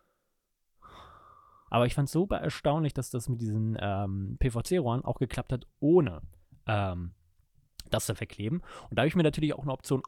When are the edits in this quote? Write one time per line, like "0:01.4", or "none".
0:01.7